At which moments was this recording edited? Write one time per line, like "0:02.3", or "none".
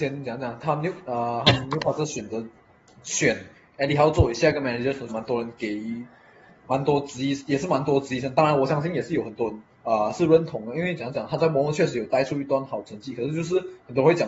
0:05.1
0:09.7